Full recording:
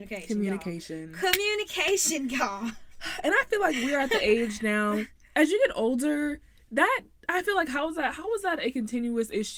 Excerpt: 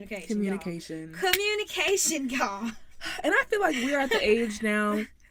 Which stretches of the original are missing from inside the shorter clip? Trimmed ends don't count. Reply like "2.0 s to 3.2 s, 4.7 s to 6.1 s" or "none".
none